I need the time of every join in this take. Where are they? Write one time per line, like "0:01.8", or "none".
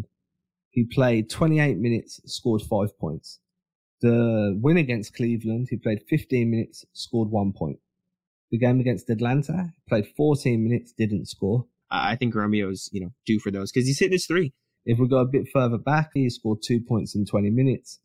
0:11.8
0:14.8
0:16.2